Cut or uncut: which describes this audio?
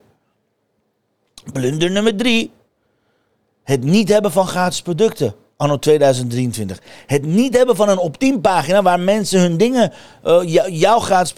uncut